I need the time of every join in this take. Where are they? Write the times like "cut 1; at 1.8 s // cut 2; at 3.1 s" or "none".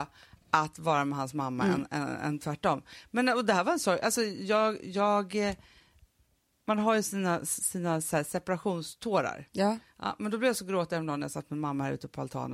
none